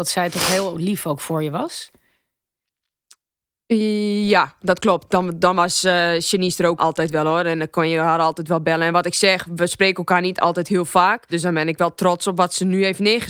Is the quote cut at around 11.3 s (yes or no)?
yes